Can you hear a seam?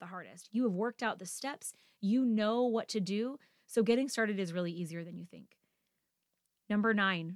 no; 0 cuts

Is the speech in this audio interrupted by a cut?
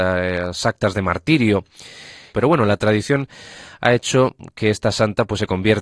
yes; 1 cut; at 2.3 s

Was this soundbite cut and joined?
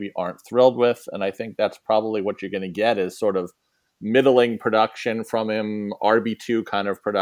no; 0 cuts

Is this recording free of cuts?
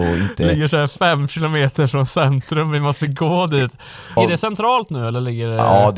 no; 1 cut; at 4.2 s

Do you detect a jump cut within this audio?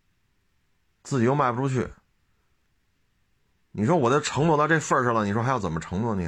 no; 0 cuts

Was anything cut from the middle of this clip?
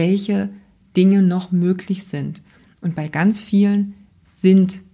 no; 0 cuts

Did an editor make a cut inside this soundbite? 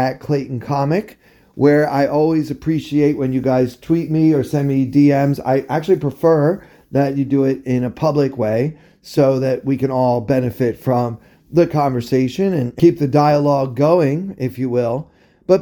no; 0 cuts

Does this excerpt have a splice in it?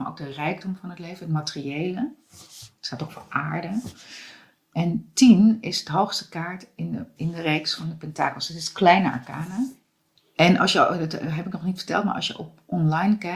yes; 1 cut; at 7.2 s

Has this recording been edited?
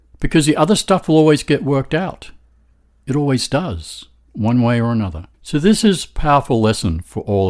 yes; 1 cut; at 5.3 s

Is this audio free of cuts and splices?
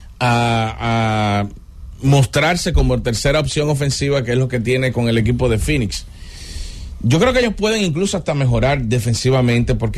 yes; 0 cuts

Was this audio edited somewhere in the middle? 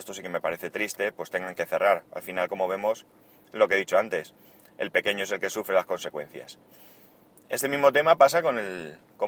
no; 0 cuts

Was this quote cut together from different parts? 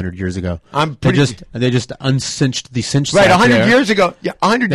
no; 0 cuts

